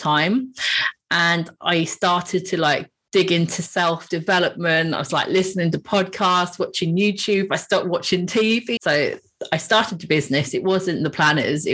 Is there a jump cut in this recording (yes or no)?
yes